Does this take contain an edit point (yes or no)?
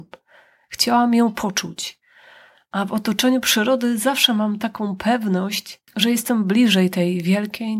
yes